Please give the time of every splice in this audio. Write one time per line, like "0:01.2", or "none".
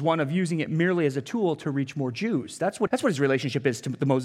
0:02.9